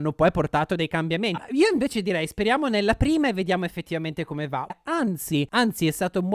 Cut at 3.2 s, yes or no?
no